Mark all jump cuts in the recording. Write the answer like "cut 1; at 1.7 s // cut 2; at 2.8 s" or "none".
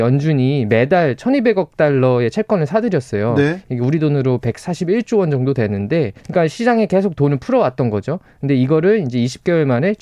cut 1; at 6.2 s